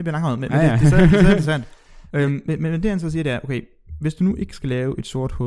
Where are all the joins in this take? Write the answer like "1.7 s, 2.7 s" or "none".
none